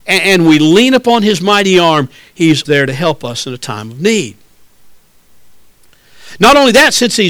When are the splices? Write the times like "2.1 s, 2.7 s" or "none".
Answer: 2.6 s

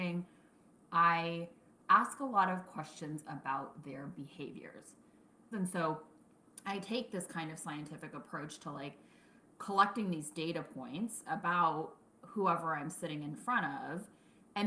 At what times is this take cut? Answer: 5.5 s

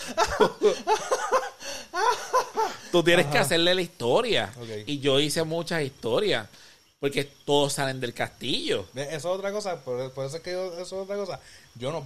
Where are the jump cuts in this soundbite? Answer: none

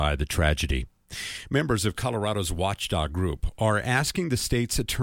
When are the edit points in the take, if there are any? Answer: none

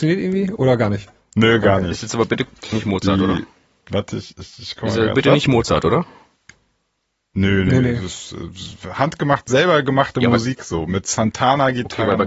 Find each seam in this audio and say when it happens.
none

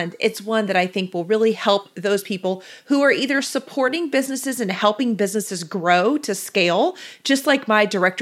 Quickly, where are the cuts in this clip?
none

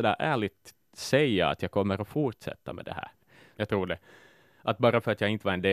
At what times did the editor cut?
3.5 s

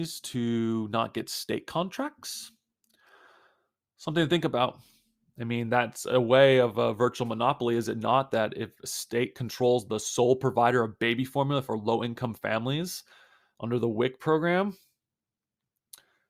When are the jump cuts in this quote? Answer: none

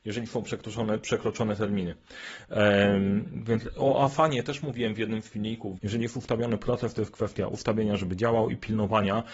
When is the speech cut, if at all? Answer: 5.8 s

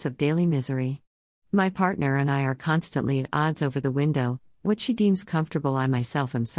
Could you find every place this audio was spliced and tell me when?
1.3 s

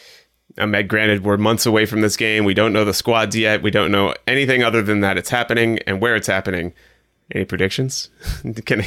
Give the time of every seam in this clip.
none

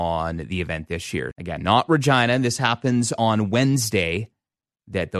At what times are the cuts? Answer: 1.3 s

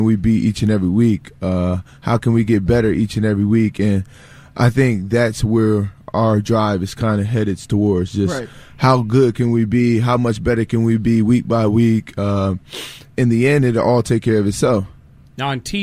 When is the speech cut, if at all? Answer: 13.1 s

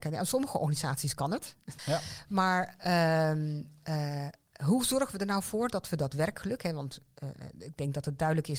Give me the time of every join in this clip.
1.8 s

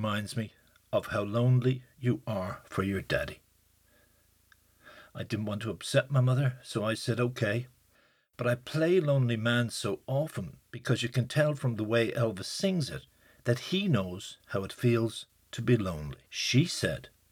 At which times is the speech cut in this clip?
16.3 s

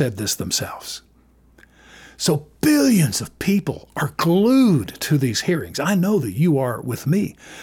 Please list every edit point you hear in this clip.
none

